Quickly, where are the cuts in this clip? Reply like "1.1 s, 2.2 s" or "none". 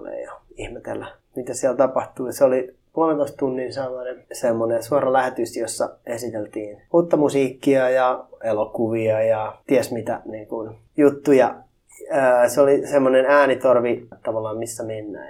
14.1 s